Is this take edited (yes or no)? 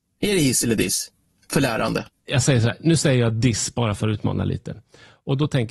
no